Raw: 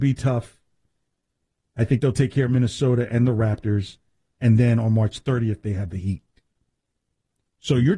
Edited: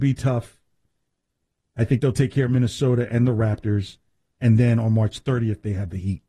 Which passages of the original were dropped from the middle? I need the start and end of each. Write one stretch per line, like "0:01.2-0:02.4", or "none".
none